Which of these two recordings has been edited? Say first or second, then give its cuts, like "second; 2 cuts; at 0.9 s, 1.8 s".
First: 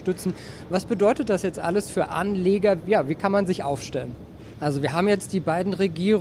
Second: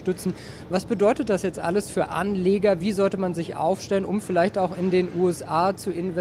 first; 2 cuts; at 2.8 s, 4.5 s